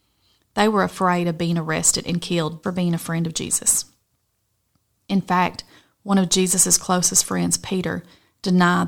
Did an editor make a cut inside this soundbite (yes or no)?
yes